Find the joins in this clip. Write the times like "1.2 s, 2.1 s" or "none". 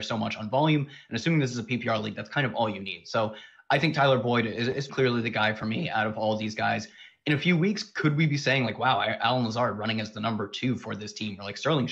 4.9 s